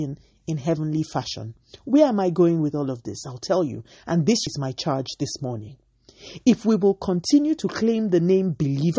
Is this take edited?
yes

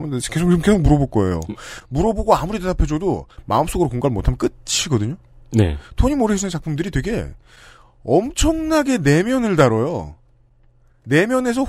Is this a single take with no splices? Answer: yes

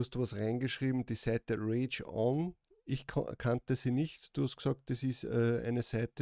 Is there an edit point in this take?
no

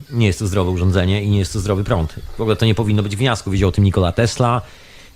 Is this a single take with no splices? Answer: yes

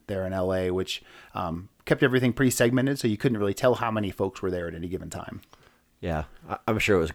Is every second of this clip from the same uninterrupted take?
yes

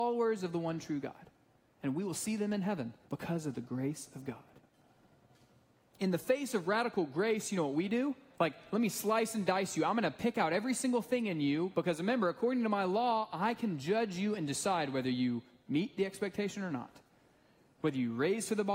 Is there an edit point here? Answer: yes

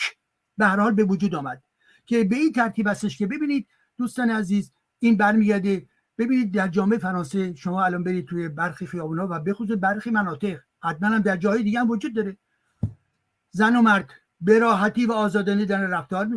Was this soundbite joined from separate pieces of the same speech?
no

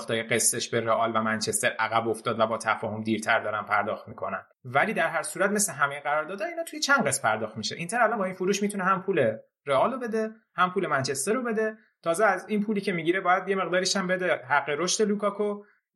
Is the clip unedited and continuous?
no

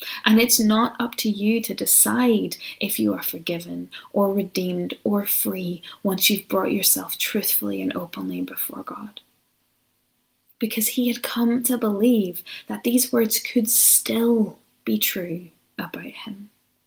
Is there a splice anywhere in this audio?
yes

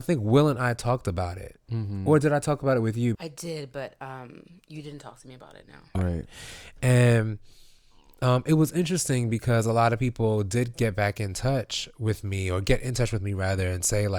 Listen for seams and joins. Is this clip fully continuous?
no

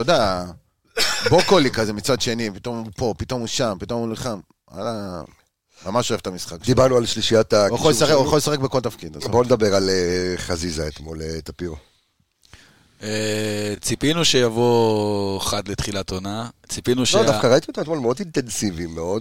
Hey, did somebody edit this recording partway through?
no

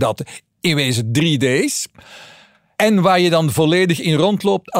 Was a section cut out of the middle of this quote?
no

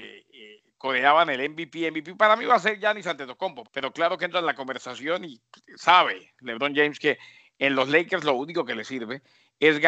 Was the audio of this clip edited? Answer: yes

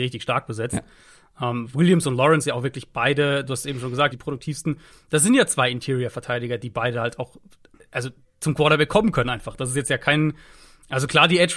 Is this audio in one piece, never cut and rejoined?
no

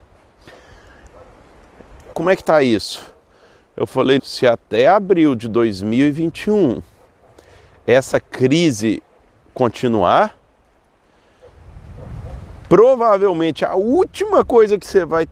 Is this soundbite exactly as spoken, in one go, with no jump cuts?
no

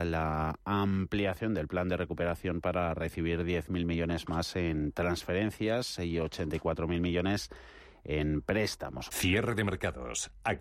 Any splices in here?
yes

